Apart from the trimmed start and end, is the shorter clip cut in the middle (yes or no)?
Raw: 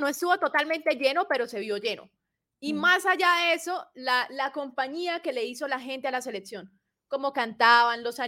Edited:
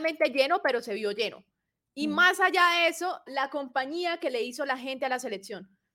yes